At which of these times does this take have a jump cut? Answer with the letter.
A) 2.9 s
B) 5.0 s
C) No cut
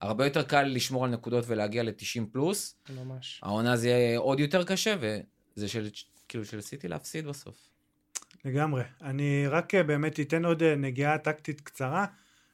A